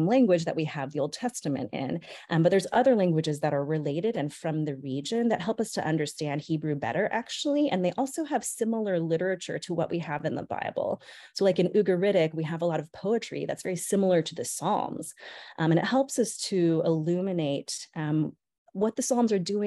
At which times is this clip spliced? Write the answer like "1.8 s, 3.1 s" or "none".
none